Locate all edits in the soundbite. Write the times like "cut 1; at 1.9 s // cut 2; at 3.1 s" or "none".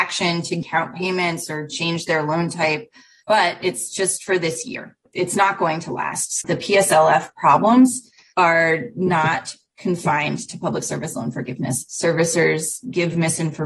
cut 1; at 6.4 s